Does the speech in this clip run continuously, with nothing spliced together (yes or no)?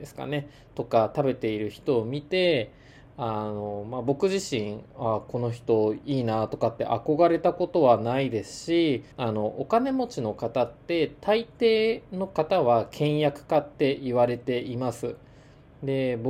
no